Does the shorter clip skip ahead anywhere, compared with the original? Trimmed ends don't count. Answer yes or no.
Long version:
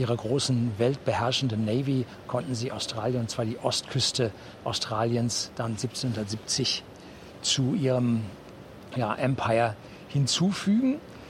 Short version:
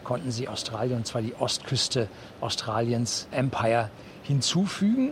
yes